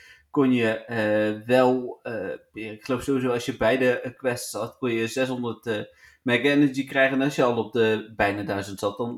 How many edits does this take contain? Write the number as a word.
zero